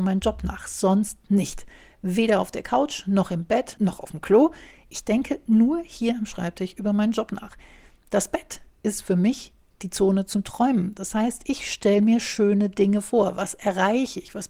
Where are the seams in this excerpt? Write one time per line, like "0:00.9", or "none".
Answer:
0:03.8

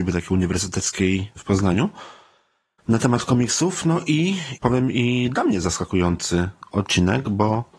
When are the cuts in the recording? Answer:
0:04.6

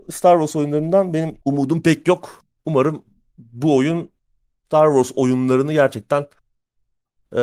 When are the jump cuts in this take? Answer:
0:01.4

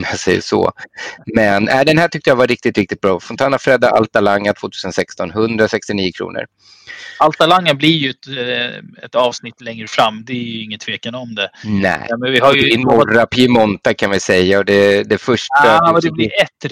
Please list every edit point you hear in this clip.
none

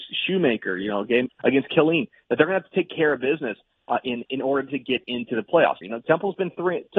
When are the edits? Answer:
0:01.3
0:05.8

